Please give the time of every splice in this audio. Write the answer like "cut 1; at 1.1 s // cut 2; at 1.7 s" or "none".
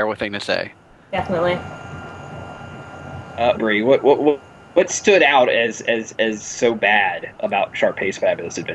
cut 1; at 3.6 s